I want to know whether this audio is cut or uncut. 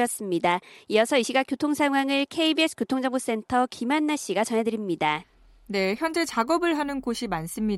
uncut